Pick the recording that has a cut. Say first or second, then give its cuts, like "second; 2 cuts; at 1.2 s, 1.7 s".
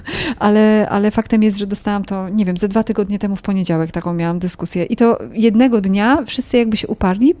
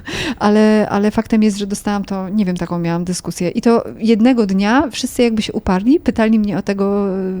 second; 1 cut; at 2.6 s